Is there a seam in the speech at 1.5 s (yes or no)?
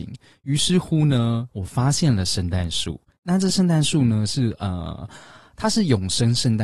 yes